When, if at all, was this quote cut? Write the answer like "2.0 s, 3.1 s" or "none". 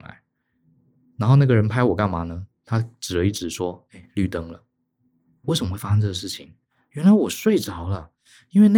none